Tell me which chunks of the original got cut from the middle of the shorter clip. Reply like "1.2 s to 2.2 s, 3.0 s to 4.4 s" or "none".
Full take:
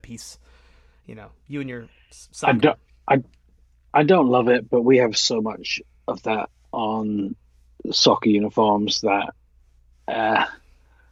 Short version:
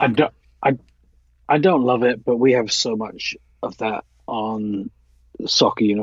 none